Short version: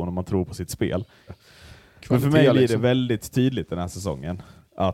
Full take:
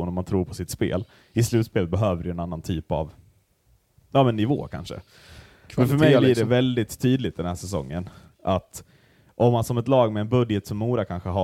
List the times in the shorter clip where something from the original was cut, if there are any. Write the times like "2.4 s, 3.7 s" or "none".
1.3 s